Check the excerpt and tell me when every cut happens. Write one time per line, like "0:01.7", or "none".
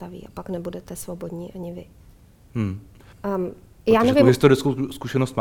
0:03.1

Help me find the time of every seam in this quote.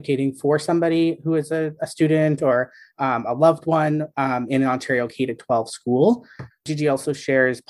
0:06.5

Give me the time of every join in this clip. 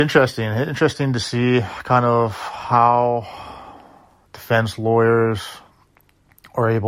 none

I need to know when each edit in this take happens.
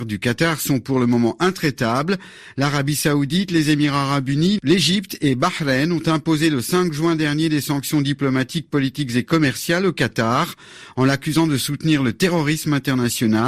none

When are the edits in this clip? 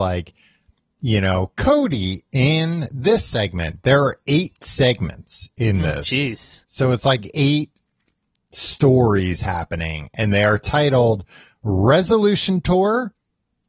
none

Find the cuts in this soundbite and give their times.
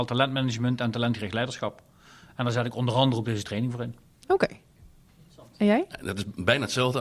none

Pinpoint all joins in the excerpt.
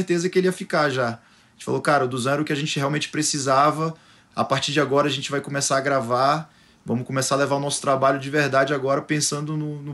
none

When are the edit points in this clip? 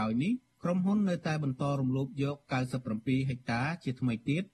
none

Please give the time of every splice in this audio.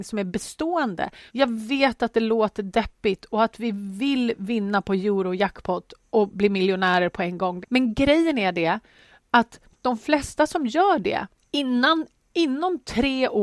0:01.3
0:07.6

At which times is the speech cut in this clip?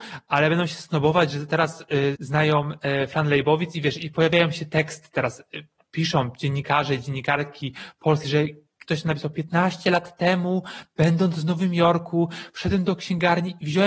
0:02.1
0:08.2

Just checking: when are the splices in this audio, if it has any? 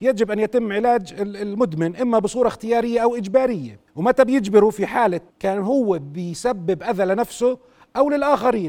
0:03.9
0:05.3

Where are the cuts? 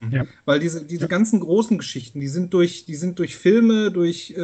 none

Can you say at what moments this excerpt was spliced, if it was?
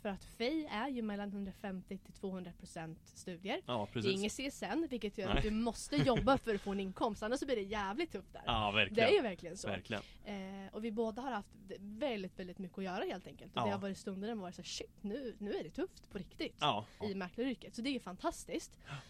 0:17.0

